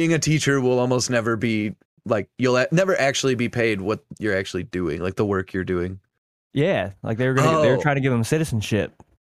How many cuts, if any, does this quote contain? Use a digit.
1